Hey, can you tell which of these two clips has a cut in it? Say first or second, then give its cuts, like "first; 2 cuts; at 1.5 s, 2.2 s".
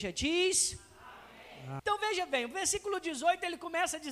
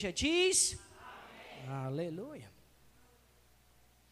first; 1 cut; at 1.8 s